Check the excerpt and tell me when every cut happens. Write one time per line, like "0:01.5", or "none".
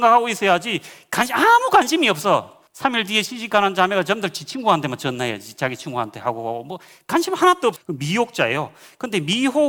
0:02.7
0:07.8

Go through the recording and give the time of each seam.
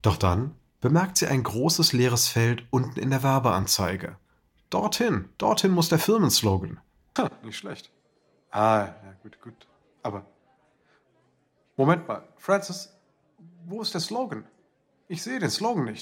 0:07.2

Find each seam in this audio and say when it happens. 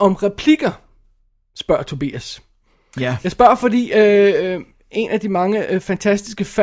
none

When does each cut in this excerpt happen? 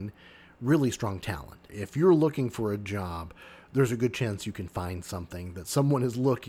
0:01.7

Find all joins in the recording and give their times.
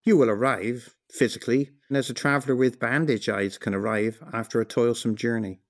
0:01.9

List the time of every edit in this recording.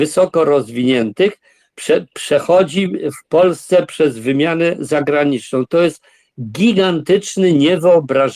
none

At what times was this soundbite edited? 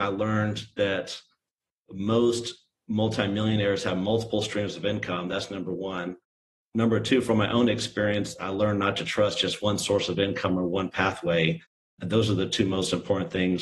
none

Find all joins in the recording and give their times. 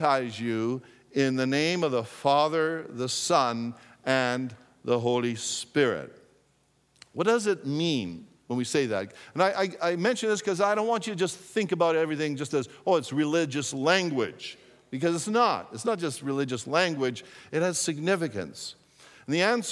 none

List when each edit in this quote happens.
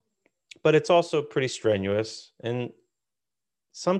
none

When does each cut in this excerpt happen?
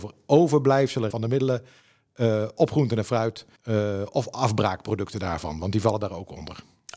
0:01.1
0:03.6

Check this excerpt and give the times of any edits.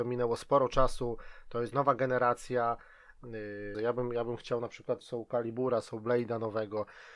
0:03.7
0:05.0

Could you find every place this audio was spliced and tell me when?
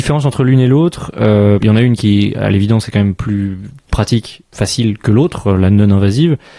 0:01.6
0:04.5

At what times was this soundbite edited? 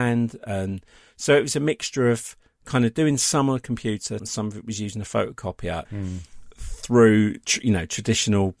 0:04.2
0:05.9

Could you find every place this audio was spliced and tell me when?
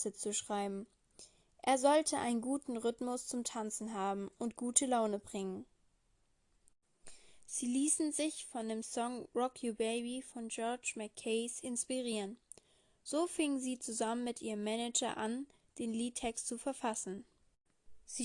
none

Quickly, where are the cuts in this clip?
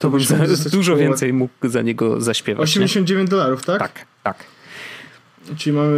none

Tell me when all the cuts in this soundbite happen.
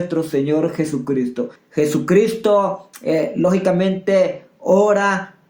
0:01.6

